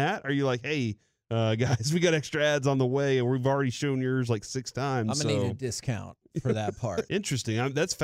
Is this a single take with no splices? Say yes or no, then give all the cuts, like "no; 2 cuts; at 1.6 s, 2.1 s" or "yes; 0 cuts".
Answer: no; 1 cut; at 7.1 s